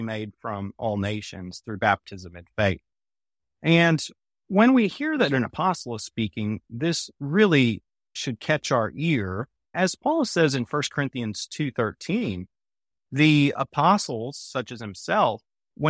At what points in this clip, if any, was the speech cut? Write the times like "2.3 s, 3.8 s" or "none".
none